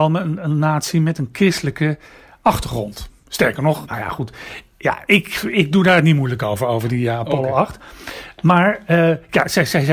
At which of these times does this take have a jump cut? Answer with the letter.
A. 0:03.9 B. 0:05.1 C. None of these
A